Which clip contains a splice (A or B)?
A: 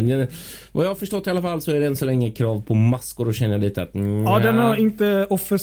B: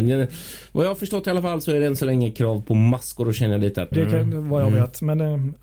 B